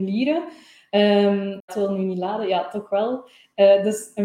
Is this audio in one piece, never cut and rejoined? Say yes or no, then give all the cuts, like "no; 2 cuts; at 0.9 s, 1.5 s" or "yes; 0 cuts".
no; 1 cut; at 1.6 s